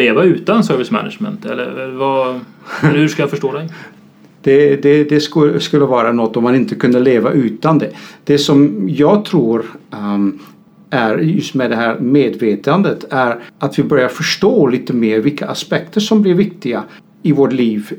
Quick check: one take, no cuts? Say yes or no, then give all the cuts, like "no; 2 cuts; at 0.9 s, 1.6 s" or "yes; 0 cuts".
yes; 0 cuts